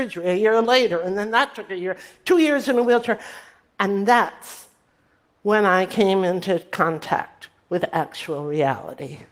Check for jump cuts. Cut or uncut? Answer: uncut